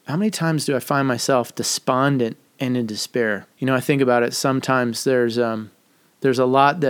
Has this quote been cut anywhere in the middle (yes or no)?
yes